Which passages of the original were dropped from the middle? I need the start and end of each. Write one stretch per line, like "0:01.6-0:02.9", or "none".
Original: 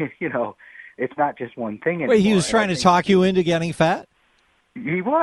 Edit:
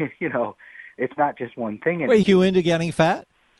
0:02.2-0:03.0